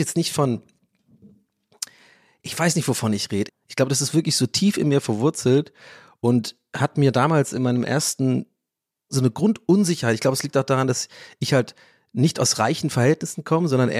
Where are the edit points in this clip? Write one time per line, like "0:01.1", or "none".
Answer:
0:03.5
0:09.1